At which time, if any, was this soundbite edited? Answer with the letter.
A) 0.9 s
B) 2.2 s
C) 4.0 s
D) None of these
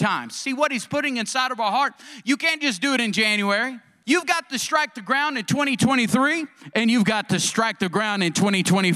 C